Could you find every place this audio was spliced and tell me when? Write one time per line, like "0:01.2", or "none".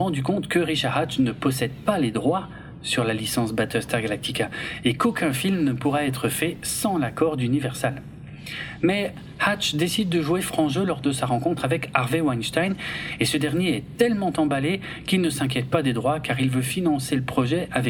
none